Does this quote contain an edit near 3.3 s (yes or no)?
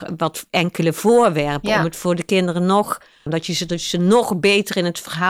yes